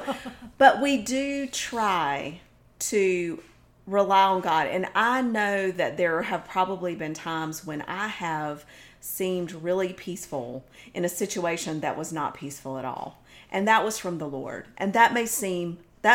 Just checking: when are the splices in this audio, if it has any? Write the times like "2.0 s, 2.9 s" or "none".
none